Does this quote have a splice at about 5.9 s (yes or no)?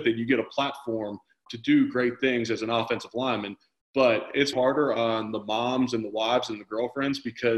no